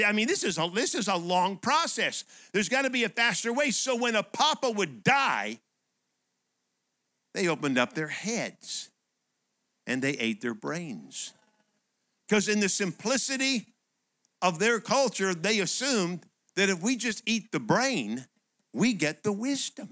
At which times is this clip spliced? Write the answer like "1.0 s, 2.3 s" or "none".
none